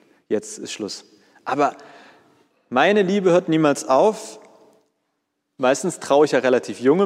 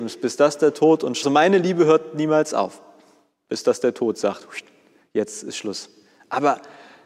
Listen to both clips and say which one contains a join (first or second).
second